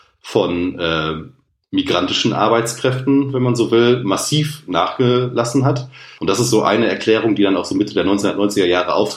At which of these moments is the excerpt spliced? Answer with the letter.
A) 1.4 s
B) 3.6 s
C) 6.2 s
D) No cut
C